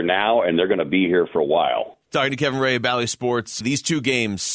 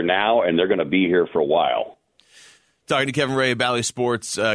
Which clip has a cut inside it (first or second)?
first